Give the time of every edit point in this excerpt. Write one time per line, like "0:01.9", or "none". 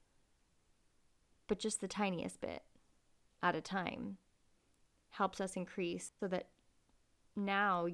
0:06.2